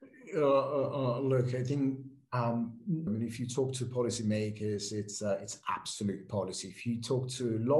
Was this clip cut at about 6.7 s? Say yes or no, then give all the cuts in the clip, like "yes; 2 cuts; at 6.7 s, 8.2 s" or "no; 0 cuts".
no; 1 cut; at 3.1 s